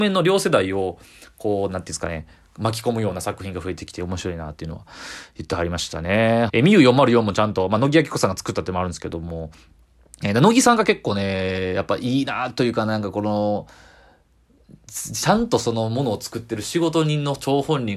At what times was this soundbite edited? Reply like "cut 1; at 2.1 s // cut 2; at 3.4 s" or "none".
cut 1; at 6.5 s